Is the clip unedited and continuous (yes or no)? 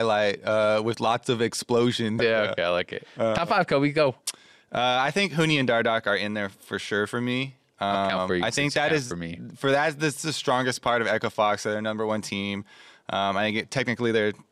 no